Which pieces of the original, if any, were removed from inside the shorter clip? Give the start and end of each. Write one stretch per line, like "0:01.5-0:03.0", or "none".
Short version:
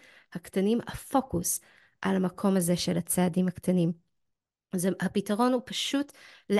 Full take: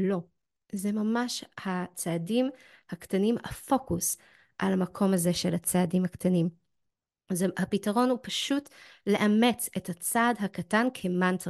none